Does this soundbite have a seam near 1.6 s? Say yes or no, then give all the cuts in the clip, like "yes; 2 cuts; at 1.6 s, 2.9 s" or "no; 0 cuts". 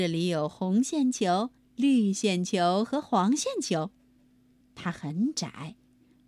yes; 2 cuts; at 1.6 s, 4.6 s